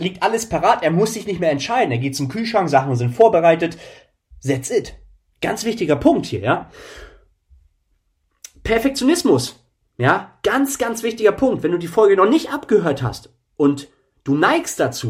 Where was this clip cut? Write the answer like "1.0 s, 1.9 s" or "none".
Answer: none

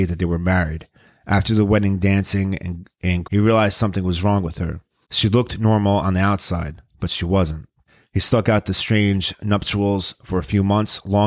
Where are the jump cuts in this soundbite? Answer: 3.2 s, 5.0 s

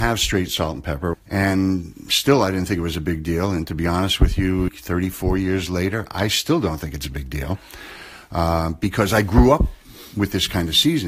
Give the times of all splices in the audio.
1.1 s, 4.7 s

